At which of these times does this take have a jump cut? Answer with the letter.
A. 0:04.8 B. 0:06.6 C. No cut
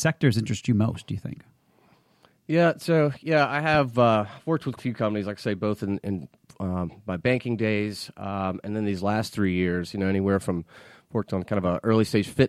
A